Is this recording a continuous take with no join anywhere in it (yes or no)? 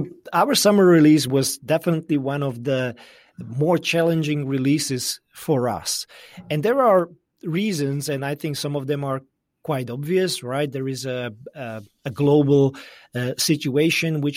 yes